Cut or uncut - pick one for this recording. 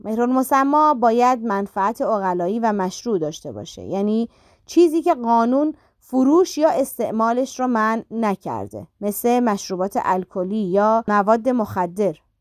cut